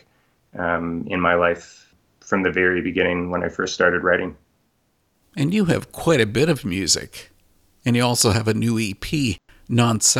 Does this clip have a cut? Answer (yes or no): no